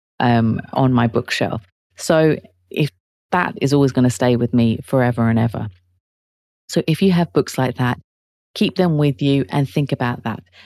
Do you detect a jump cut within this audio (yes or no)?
no